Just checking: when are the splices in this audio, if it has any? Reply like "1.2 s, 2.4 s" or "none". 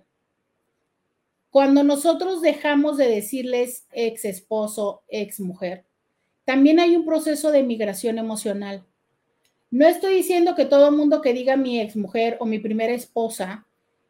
3.9 s